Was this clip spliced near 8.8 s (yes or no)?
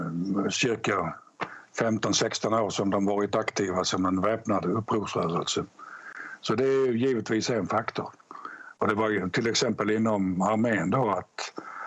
yes